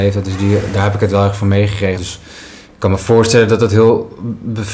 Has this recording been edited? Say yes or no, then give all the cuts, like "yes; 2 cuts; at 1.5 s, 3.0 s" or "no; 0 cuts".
yes; 1 cut; at 2.0 s